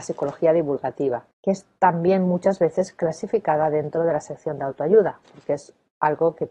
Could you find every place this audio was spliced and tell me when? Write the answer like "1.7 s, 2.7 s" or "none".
1.3 s, 5.2 s